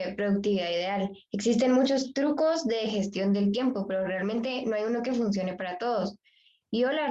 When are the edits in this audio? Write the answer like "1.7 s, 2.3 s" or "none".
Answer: none